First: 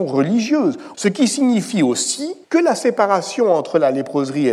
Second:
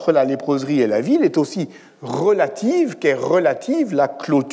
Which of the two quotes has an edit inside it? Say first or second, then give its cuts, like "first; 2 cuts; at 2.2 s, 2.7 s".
first; 2 cuts; at 0.9 s, 2.4 s